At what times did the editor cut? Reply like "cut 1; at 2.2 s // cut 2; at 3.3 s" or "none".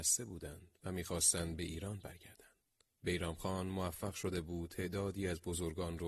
none